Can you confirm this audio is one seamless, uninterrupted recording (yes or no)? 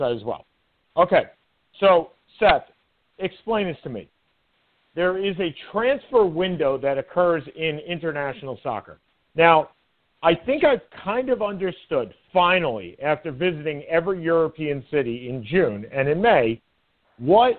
yes